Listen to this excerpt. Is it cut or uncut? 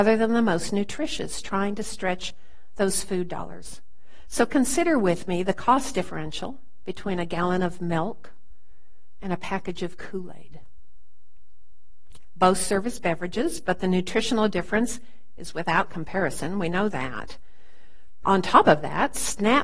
cut